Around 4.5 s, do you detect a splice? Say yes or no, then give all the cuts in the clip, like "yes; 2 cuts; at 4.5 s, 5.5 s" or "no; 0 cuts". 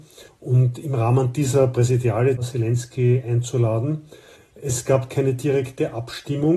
no; 1 cut; at 2.4 s